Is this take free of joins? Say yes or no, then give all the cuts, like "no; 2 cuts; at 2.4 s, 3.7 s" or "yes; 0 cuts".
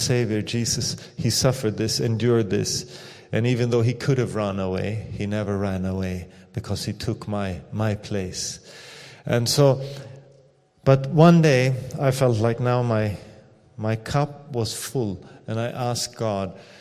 yes; 0 cuts